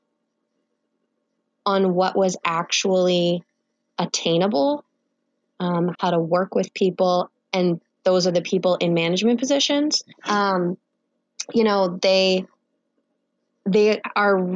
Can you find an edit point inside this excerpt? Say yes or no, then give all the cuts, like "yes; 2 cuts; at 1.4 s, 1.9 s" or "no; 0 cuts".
yes; 2 cuts; at 5.9 s, 10.1 s